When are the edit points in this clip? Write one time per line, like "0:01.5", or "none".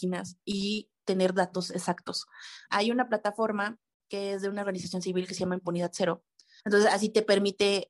0:02.7
0:06.6